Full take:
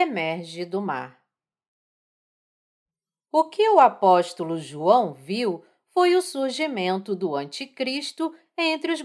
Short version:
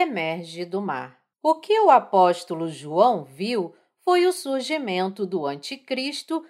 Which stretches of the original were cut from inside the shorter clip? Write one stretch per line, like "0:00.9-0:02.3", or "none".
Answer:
0:01.3-0:03.2